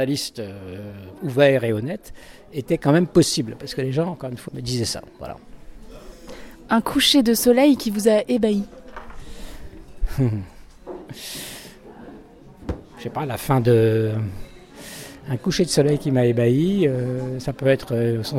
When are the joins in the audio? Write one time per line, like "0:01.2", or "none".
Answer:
0:04.5